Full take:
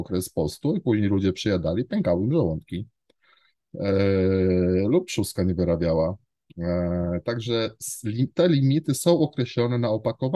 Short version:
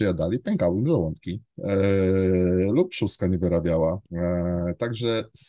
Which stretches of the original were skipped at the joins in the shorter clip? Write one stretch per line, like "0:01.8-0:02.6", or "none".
0:03.0-0:03.7
0:06.2-0:06.5

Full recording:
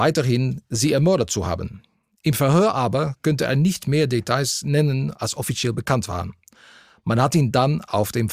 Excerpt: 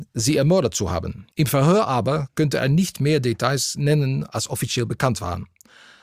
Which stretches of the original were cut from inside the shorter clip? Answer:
0:01.9-0:02.2

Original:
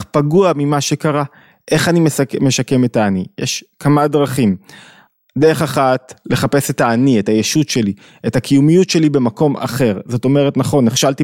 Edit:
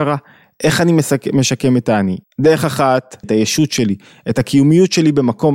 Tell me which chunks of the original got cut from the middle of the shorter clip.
0:03.3-0:05.2
0:06.2-0:07.2

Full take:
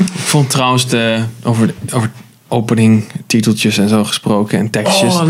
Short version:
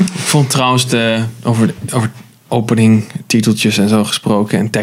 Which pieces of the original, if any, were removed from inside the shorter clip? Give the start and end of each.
none

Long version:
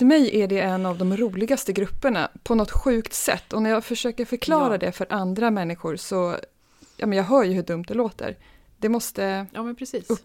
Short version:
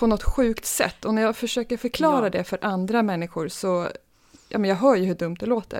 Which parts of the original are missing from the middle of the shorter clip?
none

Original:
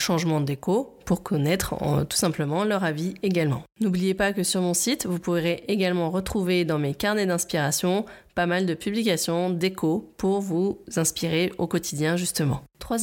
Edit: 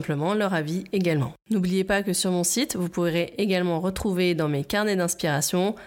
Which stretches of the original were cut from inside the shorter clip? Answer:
none

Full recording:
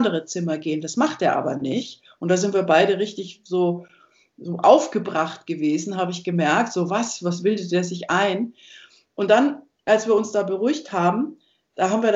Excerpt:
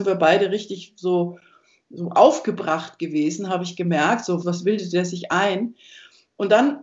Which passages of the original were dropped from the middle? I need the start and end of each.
0:06.9-0:07.2

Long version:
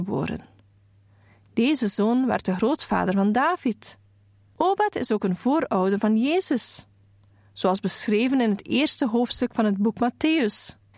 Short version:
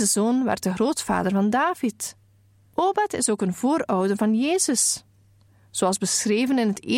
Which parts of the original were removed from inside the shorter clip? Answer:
none

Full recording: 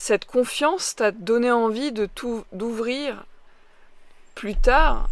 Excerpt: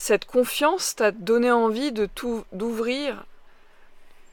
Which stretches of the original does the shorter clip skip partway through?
none

